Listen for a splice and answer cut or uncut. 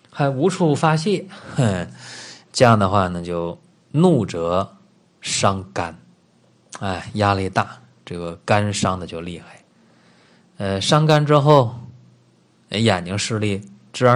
uncut